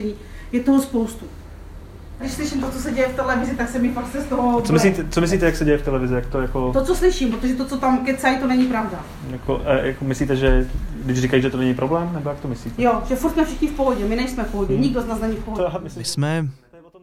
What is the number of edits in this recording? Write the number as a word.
zero